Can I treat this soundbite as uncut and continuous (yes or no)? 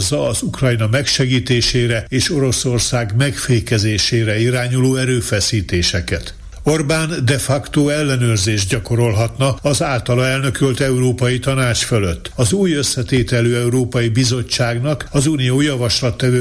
yes